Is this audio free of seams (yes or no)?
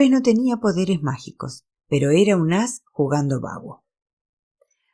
yes